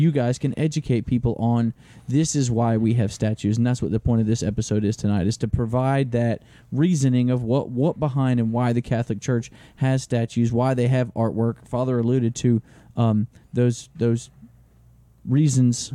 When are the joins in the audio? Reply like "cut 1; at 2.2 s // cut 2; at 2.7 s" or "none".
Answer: none